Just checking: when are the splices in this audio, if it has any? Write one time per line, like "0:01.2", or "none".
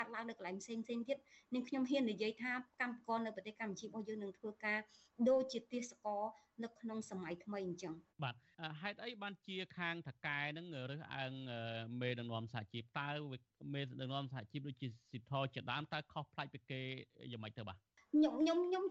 0:08.1